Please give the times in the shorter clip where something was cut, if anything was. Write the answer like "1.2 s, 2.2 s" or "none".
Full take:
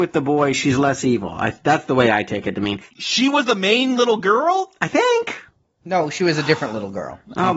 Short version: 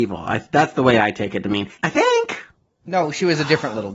1.8 s